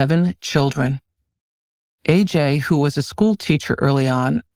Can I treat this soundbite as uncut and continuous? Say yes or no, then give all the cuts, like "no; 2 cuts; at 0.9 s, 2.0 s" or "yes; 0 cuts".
yes; 0 cuts